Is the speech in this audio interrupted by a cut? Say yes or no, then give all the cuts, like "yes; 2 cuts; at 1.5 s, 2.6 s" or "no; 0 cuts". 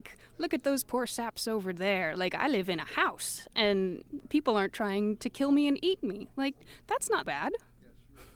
yes; 2 cuts; at 2.2 s, 7.2 s